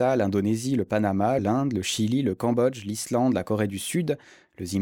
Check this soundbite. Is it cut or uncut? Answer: cut